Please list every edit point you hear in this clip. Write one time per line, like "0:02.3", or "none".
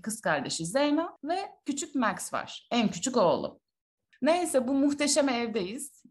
0:01.2
0:04.1